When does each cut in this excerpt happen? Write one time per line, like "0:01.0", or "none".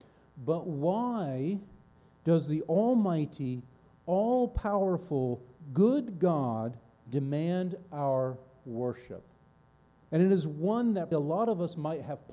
0:10.1
0:11.1